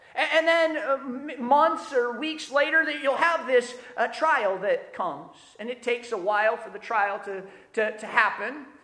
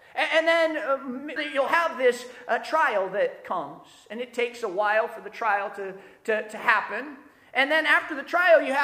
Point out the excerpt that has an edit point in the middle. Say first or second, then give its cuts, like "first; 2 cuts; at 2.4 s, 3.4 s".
second; 1 cut; at 1.4 s